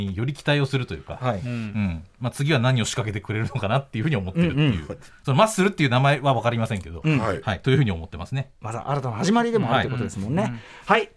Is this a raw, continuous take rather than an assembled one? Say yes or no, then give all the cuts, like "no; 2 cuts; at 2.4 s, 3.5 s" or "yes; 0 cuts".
yes; 0 cuts